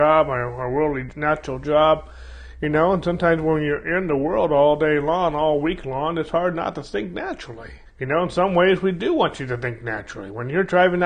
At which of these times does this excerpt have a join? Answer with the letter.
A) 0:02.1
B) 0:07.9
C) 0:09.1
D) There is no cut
B